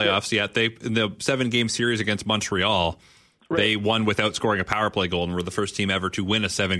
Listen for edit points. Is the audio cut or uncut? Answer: uncut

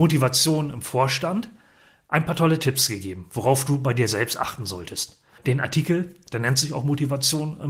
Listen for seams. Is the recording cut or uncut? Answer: uncut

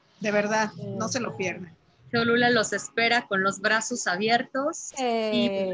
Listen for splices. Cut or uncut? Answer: uncut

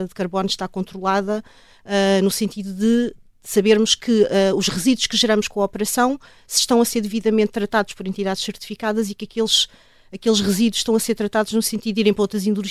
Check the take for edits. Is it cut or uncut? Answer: uncut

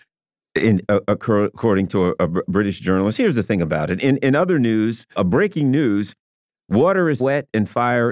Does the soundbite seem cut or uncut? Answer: cut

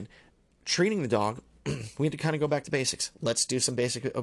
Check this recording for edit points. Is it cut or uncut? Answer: uncut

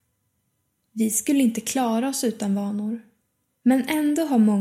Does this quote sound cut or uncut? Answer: uncut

